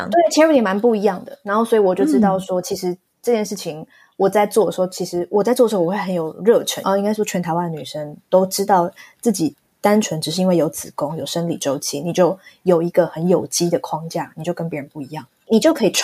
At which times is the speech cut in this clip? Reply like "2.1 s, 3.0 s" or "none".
6.8 s